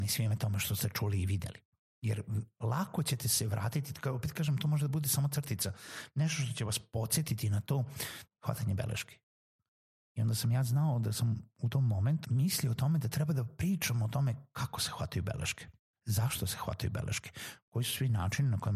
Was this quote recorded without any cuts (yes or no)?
no